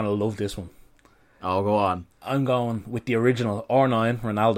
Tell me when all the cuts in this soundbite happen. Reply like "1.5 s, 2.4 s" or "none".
2.1 s